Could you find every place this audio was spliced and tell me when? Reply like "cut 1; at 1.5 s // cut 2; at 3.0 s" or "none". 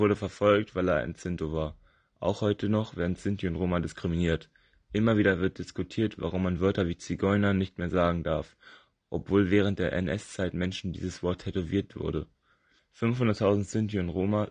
cut 1; at 12.8 s